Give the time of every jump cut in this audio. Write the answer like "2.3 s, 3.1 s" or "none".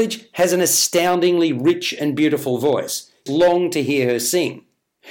3.3 s